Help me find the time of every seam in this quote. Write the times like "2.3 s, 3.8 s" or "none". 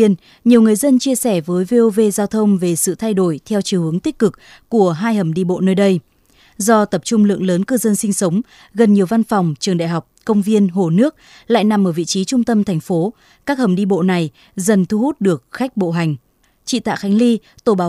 none